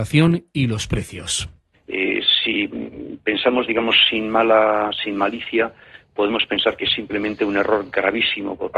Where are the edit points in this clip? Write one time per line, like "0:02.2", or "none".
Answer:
none